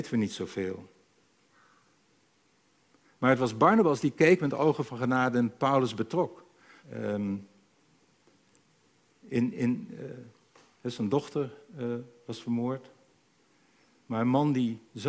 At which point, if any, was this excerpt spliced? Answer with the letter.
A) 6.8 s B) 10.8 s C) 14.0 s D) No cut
A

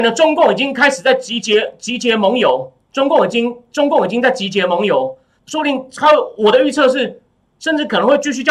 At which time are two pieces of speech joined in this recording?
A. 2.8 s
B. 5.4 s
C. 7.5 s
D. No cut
B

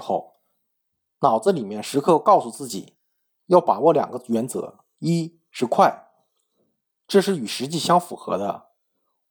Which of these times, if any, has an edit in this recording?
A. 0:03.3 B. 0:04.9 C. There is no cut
B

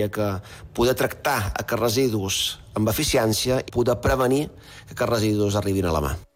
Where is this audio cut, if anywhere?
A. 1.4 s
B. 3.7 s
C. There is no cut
B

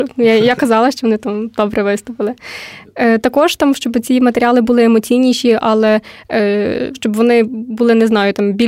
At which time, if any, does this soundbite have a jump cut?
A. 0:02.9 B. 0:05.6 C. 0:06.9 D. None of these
C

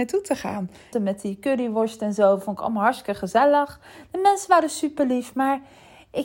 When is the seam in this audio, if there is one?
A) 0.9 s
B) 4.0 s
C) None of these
A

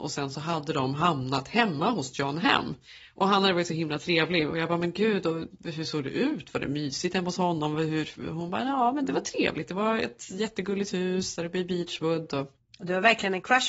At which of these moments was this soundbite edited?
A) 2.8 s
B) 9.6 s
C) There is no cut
C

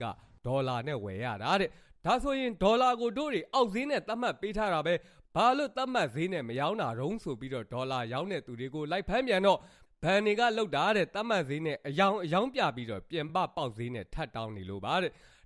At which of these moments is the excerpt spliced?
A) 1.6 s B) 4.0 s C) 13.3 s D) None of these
D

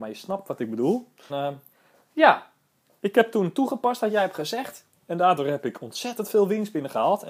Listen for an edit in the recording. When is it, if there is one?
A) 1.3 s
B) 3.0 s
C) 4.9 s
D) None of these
A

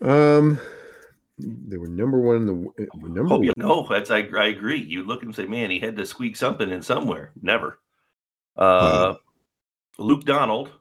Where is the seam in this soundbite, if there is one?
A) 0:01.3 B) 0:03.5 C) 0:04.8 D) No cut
B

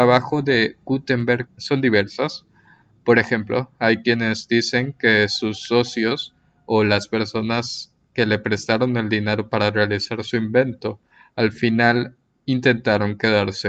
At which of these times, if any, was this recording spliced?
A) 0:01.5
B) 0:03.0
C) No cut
A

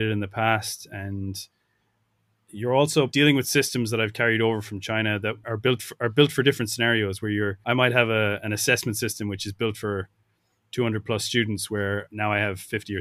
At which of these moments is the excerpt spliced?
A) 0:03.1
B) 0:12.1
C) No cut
A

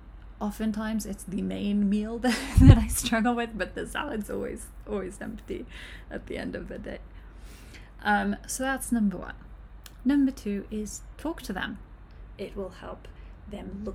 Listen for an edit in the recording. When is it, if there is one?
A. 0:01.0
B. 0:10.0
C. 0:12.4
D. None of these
C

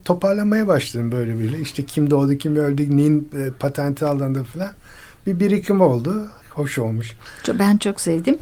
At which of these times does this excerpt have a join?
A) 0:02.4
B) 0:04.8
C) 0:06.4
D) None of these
C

